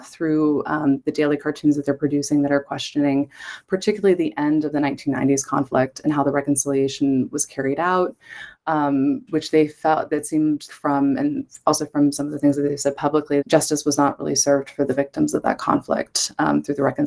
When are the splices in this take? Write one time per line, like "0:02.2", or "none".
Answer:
0:09.3
0:10.7
0:13.4